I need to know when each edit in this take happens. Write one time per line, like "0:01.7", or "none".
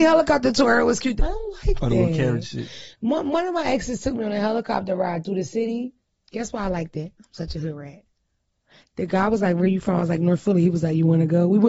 0:01.2